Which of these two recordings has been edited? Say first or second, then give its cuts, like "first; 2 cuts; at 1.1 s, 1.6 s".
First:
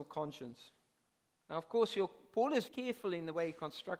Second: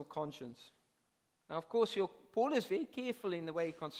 first; 1 cut; at 2.7 s